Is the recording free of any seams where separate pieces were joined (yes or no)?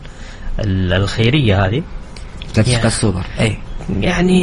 yes